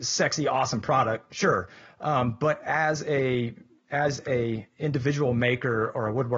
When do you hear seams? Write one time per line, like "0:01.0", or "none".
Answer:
none